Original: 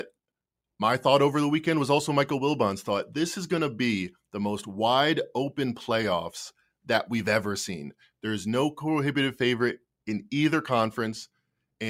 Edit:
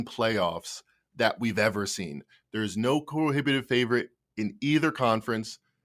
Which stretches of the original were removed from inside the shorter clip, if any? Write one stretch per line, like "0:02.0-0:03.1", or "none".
none